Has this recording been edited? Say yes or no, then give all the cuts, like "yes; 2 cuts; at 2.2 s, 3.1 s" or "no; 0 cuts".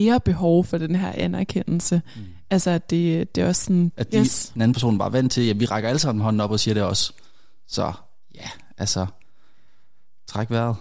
yes; 1 cut; at 3.9 s